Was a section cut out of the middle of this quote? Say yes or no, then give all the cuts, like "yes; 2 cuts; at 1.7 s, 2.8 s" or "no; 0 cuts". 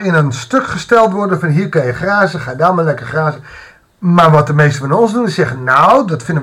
no; 0 cuts